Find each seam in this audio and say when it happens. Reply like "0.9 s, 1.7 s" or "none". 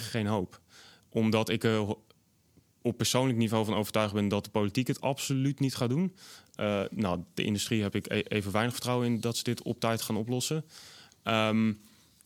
none